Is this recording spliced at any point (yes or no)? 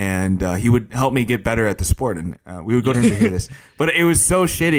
yes